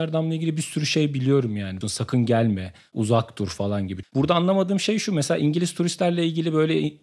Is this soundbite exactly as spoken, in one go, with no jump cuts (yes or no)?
no